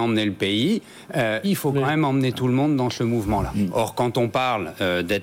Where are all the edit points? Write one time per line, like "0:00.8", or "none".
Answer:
0:01.4
0:03.7